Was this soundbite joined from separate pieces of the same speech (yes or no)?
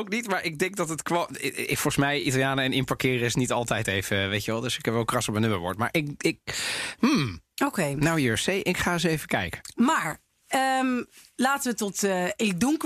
no